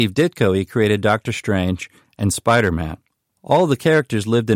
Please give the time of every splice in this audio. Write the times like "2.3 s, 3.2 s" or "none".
none